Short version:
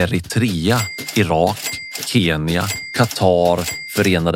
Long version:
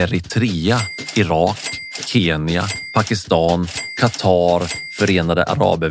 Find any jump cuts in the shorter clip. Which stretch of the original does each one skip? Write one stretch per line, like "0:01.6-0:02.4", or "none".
0:02.9-0:03.9